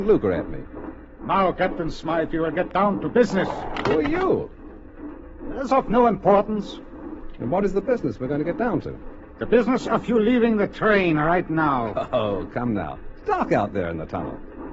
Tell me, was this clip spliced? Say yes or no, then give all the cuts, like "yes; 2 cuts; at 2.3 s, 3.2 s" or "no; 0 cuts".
no; 0 cuts